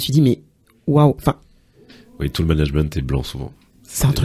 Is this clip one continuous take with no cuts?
yes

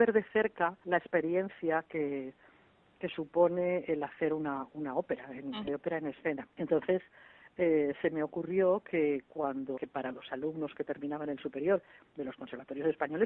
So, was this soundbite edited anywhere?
yes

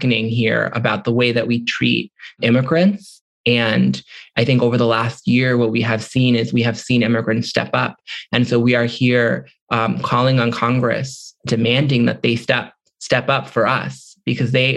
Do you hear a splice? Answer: no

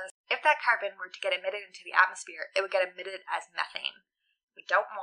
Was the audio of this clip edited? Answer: no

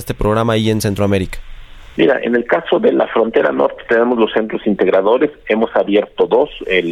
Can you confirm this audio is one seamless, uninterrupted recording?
yes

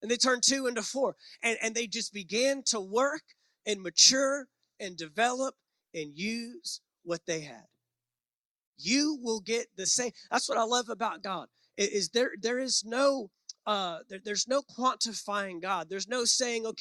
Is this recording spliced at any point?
no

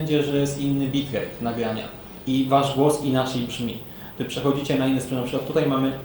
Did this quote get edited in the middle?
yes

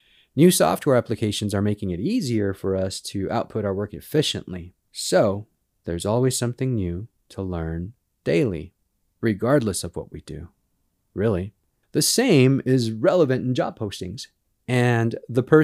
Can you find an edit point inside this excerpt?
no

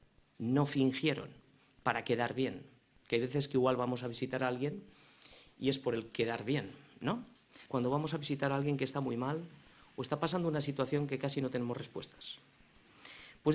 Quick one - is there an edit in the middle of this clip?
yes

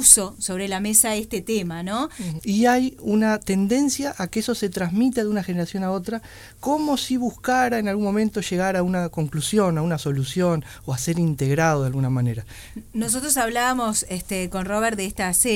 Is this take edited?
yes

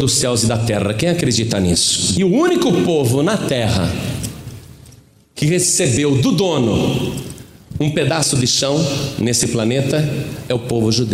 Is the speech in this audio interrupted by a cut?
yes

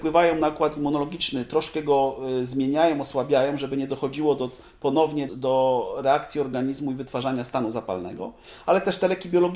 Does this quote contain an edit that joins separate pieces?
yes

